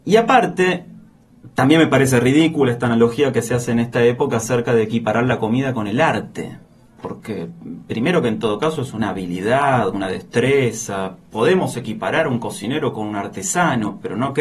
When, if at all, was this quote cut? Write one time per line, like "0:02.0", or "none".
none